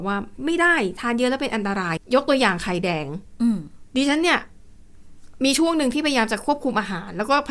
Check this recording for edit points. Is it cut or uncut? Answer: cut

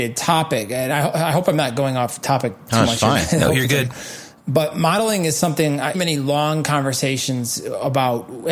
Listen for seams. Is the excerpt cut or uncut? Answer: cut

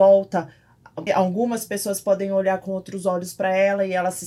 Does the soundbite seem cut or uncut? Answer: cut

